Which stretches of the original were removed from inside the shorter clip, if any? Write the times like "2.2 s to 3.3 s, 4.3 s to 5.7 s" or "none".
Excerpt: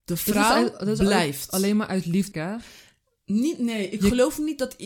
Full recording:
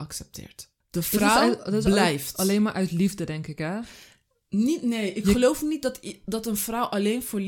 3.2 s to 3.6 s